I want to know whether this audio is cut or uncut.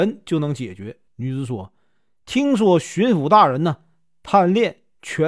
cut